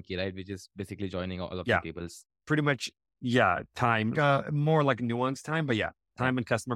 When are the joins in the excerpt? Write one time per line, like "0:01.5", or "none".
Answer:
0:04.1